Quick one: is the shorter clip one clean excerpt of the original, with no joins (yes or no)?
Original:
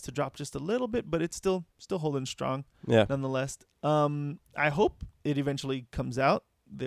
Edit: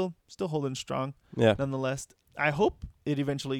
no